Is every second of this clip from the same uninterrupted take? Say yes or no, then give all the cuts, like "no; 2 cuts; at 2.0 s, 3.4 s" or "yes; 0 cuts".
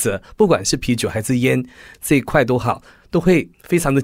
yes; 0 cuts